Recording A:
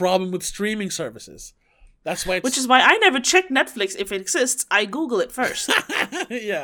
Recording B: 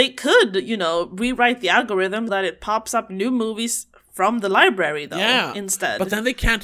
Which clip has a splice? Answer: B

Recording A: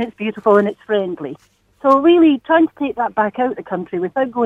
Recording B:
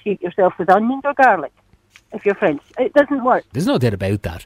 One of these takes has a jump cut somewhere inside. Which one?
B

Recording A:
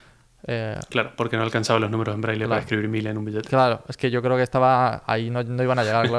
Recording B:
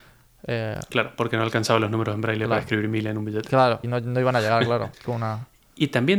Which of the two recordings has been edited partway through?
B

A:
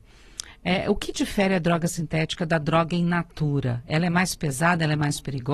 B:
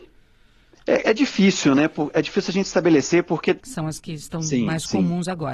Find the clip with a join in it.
B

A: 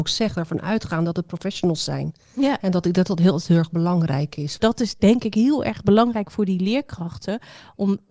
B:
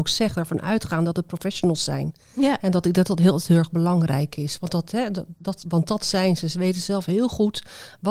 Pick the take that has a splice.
A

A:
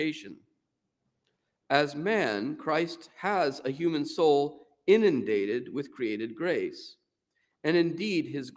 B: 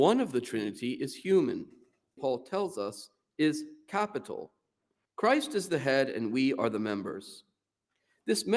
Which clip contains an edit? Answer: B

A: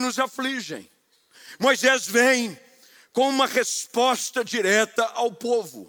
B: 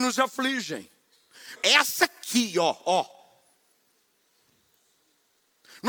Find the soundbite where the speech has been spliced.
B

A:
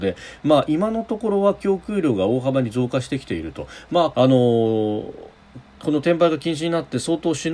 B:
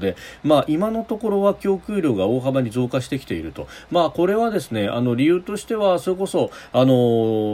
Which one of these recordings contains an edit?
A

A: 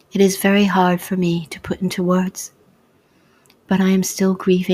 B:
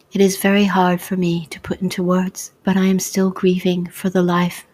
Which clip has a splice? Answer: B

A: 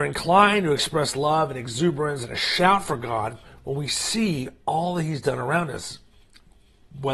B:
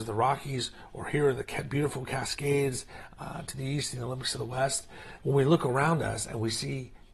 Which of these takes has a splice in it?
B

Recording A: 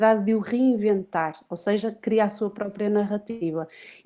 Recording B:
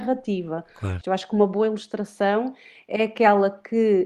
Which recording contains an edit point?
B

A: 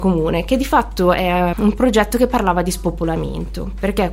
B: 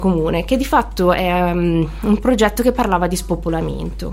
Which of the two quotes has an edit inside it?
A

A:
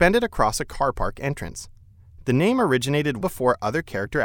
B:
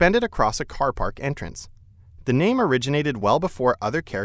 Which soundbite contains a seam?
A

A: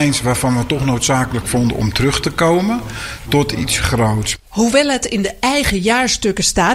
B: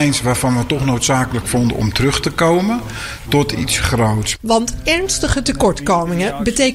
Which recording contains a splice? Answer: B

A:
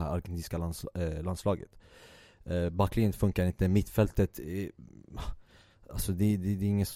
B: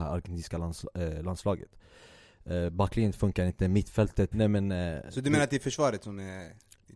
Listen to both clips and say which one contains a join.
B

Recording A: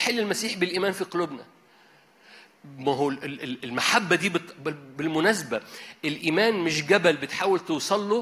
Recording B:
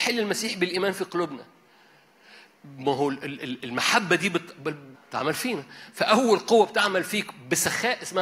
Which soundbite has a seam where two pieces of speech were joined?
B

